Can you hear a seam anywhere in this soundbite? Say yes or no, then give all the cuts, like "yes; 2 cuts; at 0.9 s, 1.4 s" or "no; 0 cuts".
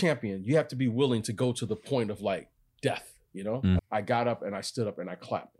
yes; 1 cut; at 3.8 s